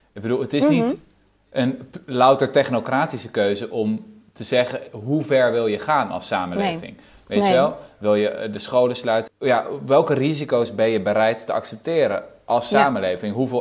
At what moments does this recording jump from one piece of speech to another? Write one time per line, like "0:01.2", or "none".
0:09.3